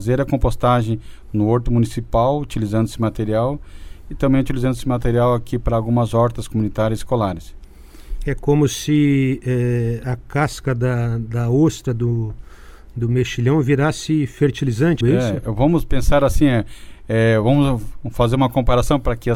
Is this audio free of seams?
no; 1 cut; at 15.0 s

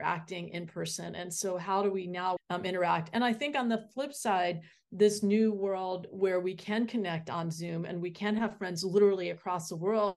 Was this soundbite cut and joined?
yes; 1 cut; at 2.4 s

